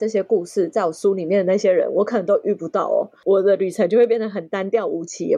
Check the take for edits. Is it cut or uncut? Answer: uncut